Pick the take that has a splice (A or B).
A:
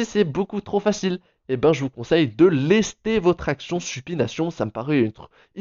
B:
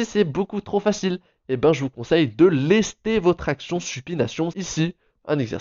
B